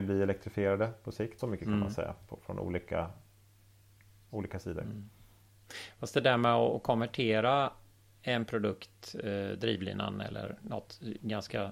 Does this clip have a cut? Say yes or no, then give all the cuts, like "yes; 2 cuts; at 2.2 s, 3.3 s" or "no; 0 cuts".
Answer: yes; 1 cut; at 1.4 s